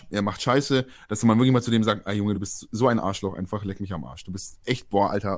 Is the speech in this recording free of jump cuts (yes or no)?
yes